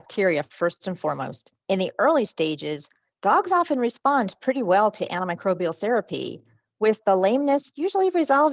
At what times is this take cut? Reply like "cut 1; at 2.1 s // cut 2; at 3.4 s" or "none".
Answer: cut 1; at 1.6 s

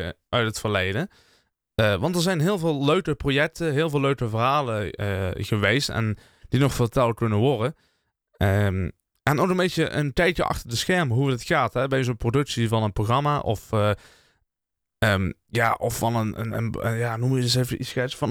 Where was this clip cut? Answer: none

